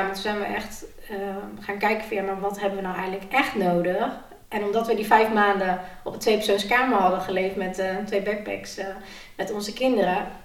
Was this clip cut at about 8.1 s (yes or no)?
no